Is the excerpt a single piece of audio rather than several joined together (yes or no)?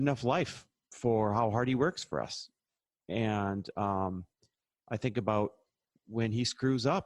yes